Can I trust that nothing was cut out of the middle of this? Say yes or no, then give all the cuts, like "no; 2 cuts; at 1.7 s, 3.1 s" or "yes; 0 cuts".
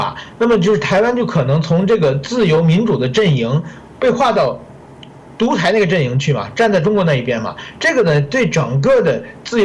yes; 0 cuts